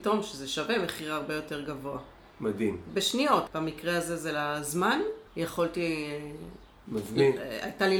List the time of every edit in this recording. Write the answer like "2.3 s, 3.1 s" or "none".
3.5 s, 5.3 s